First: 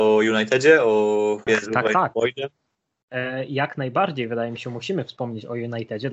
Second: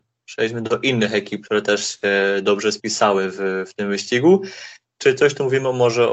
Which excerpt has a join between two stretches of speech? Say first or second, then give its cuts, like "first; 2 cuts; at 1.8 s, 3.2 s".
first; 1 cut; at 1.5 s